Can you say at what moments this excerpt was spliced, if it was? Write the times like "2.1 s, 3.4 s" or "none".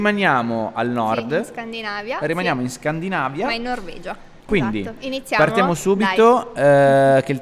4.4 s